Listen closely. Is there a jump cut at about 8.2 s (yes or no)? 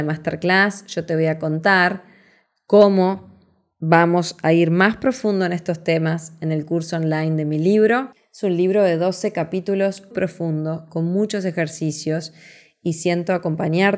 yes